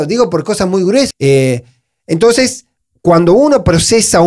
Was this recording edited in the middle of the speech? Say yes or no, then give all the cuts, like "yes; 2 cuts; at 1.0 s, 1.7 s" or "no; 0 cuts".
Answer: yes; 1 cut; at 1.1 s